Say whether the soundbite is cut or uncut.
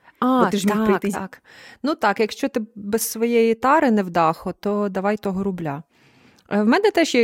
cut